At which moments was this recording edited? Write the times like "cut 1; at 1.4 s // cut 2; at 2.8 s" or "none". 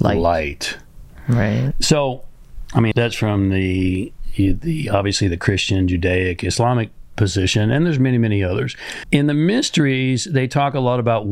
cut 1; at 2.9 s // cut 2; at 9.0 s